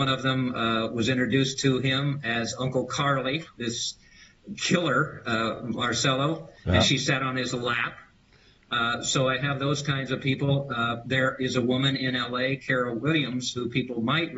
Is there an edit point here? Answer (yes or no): no